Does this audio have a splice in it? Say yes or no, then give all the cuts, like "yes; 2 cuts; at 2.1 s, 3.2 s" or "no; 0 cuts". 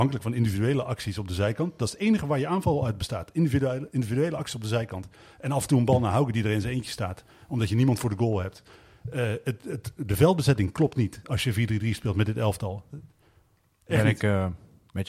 no; 0 cuts